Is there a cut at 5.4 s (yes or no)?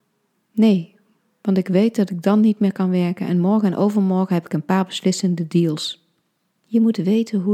no